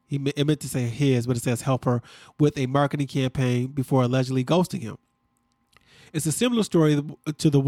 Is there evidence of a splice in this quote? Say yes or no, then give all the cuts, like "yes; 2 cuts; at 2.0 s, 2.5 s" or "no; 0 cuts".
no; 0 cuts